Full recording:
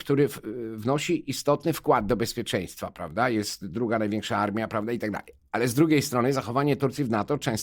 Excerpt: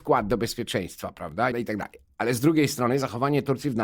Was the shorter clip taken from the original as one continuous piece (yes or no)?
no